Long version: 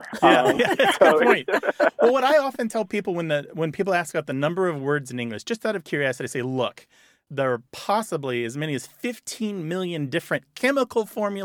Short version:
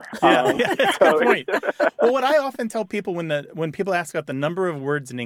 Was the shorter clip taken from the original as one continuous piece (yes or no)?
yes